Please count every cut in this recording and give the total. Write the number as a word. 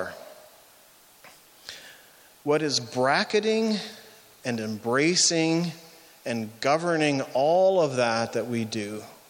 zero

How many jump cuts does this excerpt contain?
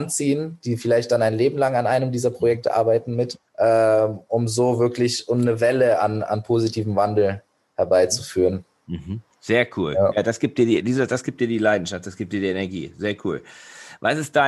two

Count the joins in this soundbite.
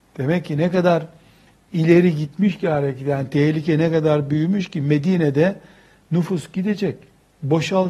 zero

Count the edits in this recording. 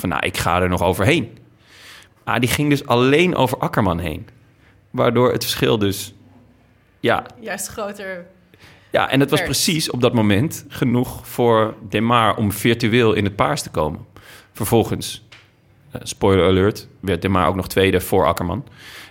zero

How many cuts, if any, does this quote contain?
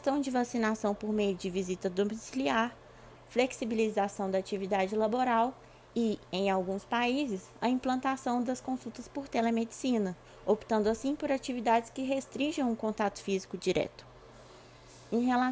one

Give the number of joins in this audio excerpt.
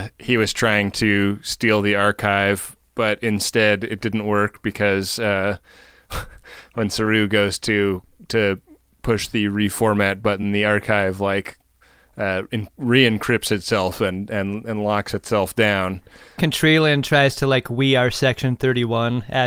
zero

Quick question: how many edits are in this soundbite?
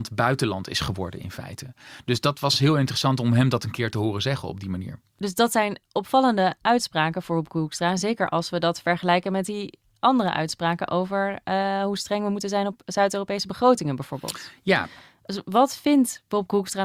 zero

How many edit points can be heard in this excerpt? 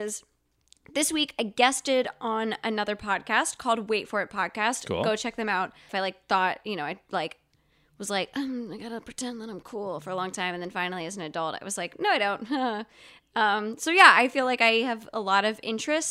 one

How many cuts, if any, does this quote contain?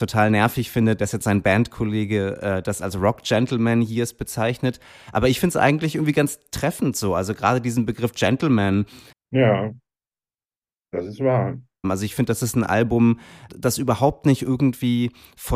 three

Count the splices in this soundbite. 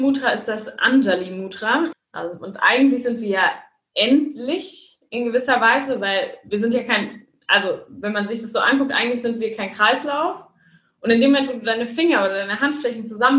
one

